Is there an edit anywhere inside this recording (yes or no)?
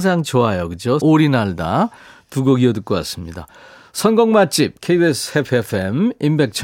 yes